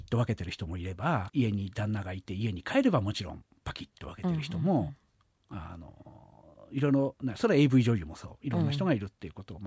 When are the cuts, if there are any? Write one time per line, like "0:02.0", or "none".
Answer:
0:01.3